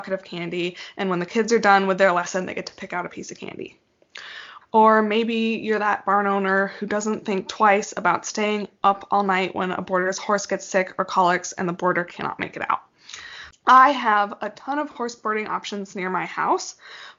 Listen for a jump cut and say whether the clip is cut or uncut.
cut